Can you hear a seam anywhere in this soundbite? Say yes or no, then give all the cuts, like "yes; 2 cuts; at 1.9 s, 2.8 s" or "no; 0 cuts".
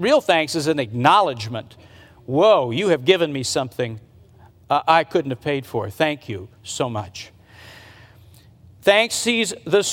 no; 0 cuts